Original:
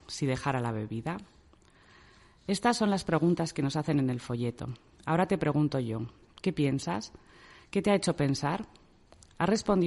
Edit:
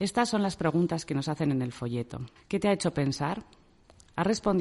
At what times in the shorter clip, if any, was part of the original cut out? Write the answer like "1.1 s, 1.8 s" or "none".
2.4 s